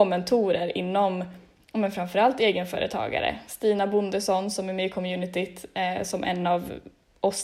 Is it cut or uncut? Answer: uncut